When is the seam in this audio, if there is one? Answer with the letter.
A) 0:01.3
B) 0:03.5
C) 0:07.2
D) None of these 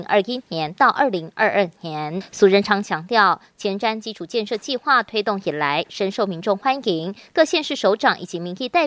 D